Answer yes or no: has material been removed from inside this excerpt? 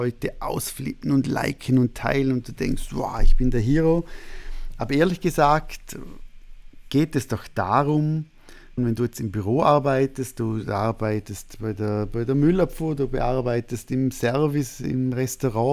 yes